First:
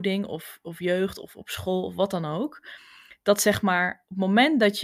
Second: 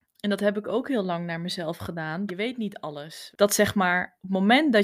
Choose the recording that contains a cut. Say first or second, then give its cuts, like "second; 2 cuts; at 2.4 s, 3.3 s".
second; 2 cuts; at 2.3 s, 3.3 s